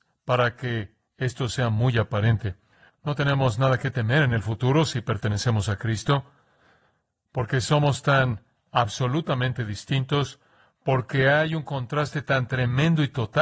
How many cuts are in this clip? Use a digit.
1